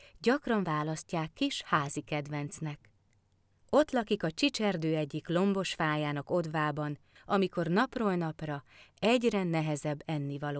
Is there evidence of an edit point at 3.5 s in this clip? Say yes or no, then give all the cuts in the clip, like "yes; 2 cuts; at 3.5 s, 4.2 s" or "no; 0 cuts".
yes; 2 cuts; at 3.5 s, 7.2 s